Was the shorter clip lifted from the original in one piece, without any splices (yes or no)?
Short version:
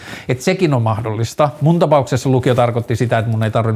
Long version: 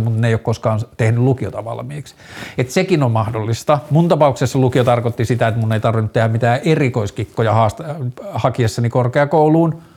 yes